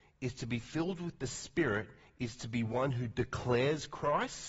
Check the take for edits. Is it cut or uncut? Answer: uncut